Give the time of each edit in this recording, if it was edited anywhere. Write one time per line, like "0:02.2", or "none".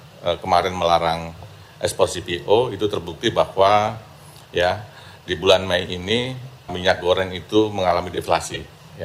0:06.7